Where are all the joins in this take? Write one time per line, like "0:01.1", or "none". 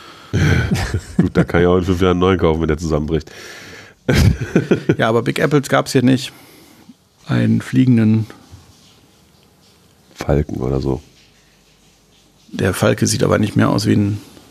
0:07.2